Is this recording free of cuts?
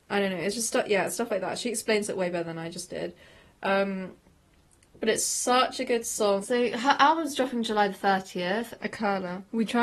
no; 2 cuts; at 6.4 s, 8.8 s

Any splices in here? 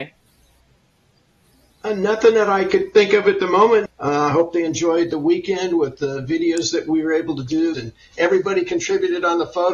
yes; 2 cuts; at 3.9 s, 7.7 s

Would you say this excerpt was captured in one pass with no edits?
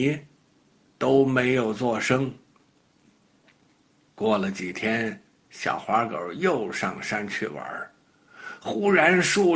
yes; 0 cuts

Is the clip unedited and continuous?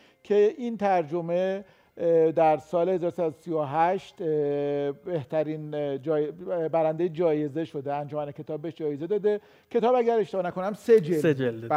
yes; 0 cuts

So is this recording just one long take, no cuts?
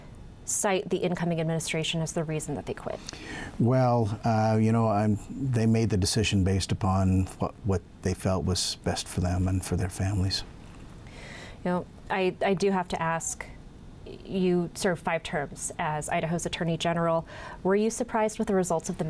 yes; 0 cuts

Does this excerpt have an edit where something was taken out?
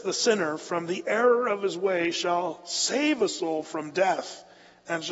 no; 0 cuts

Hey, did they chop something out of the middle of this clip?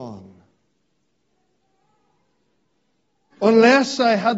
yes; 1 cut; at 3.3 s

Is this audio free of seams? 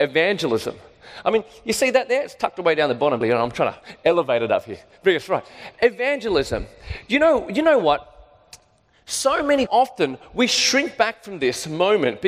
no; 2 cuts; at 3.2 s, 9.7 s

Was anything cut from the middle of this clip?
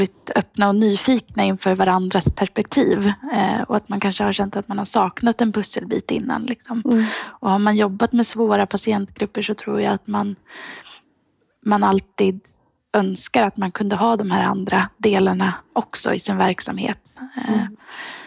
no; 0 cuts

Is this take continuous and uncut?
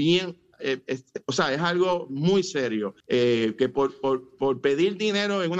no; 1 cut; at 3.0 s

